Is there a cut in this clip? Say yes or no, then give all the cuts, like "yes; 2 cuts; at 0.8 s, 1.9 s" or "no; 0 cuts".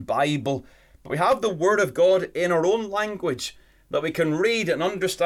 no; 0 cuts